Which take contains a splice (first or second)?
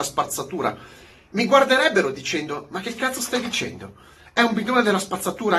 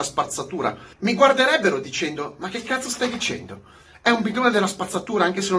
second